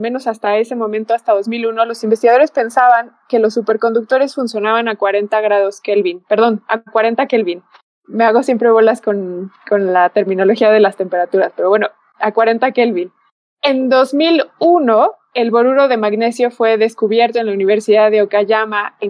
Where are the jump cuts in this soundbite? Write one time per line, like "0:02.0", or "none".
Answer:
none